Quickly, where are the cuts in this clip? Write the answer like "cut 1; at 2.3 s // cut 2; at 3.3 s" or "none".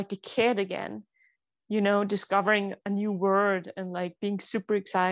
none